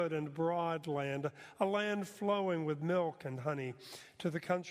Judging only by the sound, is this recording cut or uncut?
uncut